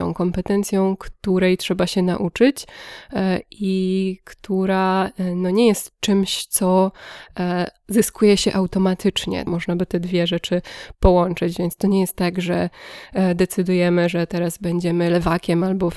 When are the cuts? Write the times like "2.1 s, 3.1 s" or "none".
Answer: 9.5 s